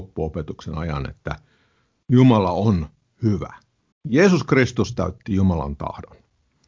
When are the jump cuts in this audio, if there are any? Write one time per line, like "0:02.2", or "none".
0:03.9